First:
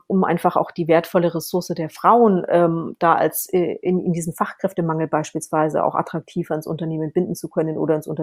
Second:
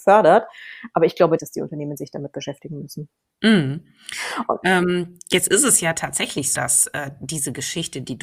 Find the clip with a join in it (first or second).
second